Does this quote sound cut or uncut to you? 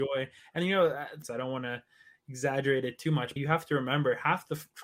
cut